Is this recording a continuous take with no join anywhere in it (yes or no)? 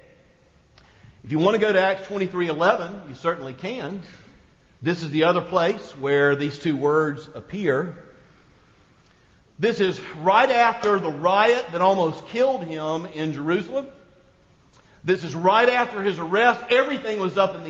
yes